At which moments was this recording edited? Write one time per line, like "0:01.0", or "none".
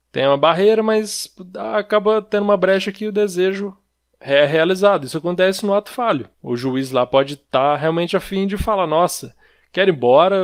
0:06.3